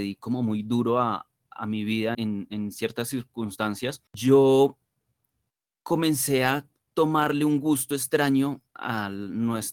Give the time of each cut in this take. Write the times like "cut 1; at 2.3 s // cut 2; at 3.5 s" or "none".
cut 1; at 2.1 s // cut 2; at 4.1 s